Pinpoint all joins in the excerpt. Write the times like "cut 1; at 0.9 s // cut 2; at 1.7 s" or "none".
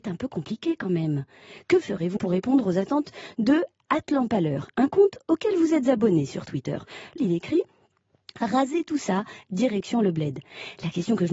cut 1; at 2.2 s // cut 2; at 7.2 s // cut 3; at 9.4 s